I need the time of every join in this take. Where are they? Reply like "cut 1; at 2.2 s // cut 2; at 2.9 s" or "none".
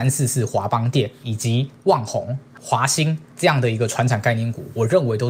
none